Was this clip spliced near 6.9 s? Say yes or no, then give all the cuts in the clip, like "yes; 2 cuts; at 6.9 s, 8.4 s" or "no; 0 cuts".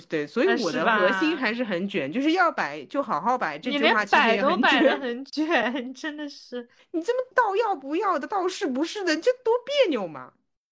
no; 0 cuts